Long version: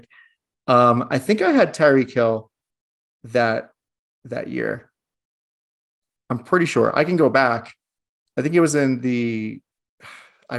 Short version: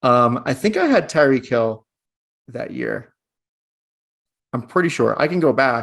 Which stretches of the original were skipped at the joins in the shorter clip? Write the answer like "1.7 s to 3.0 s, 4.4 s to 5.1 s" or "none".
3.0 s to 4.1 s